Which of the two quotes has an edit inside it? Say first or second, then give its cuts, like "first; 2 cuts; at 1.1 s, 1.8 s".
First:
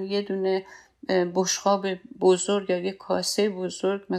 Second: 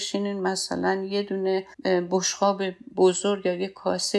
second; 1 cut; at 1.7 s